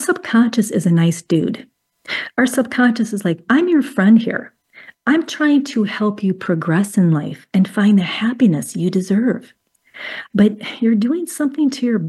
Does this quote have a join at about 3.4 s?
yes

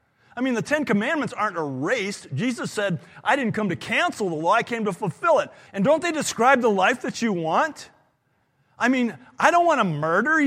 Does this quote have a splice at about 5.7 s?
yes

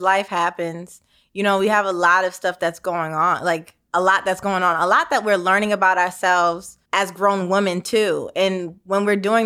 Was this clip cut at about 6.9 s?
yes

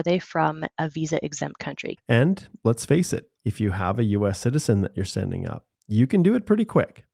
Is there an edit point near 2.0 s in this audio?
yes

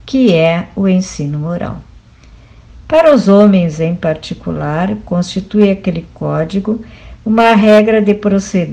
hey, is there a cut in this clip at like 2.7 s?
yes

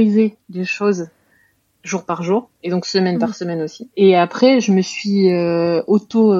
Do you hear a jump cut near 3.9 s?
yes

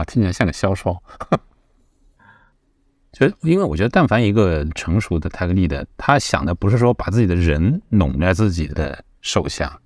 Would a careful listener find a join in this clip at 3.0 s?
no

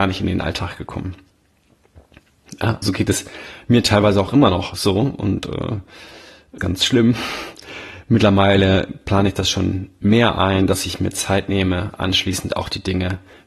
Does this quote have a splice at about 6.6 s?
yes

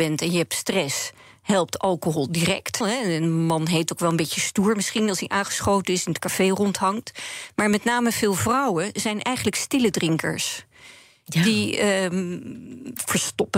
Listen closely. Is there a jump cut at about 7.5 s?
no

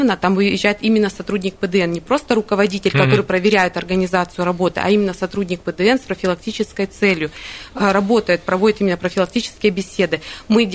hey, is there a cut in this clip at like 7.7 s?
no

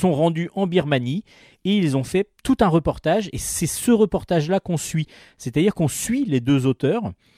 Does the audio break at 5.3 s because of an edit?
no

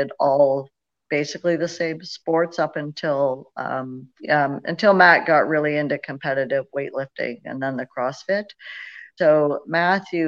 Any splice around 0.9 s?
no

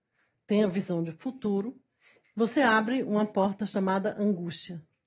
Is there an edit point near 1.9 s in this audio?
no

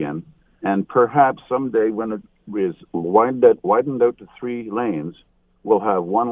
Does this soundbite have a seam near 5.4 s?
no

